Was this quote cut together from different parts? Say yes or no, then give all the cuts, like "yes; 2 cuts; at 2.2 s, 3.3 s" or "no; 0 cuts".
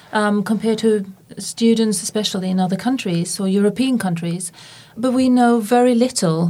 no; 0 cuts